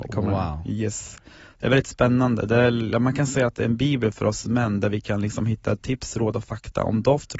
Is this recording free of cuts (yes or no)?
yes